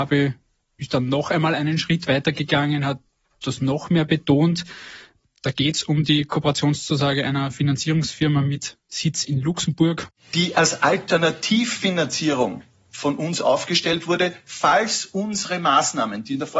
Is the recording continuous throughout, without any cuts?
yes; 0 cuts

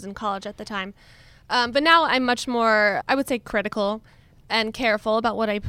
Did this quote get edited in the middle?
yes; 1 cut; at 3.0 s

